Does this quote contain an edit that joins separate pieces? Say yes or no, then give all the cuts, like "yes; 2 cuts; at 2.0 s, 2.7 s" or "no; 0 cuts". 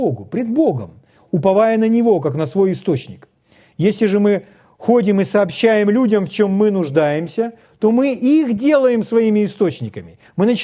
no; 0 cuts